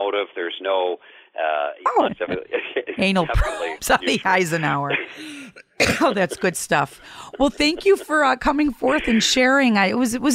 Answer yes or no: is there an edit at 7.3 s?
no